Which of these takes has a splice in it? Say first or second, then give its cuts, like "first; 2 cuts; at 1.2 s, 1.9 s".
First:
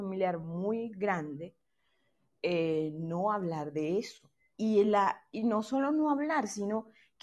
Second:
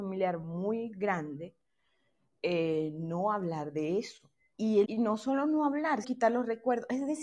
second; 2 cuts; at 4.8 s, 6.0 s